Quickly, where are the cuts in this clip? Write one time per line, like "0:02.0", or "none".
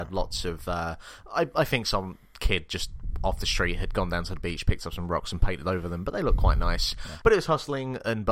0:07.2